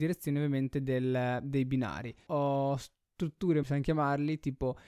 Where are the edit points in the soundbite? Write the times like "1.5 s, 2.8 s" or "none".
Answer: 2.3 s, 3.6 s